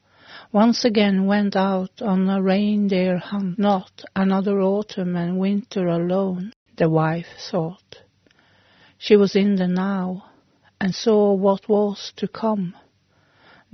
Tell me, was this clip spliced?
no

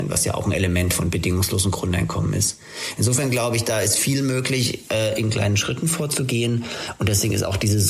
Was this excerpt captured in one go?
yes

